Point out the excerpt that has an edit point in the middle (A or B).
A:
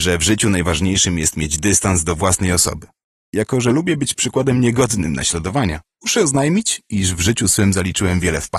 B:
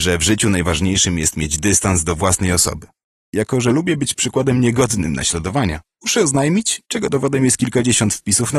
B